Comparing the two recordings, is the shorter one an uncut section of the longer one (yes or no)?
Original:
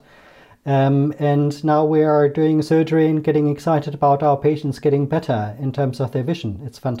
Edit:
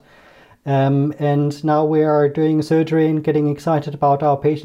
yes